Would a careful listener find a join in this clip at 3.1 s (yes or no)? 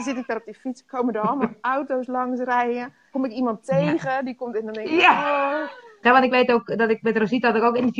yes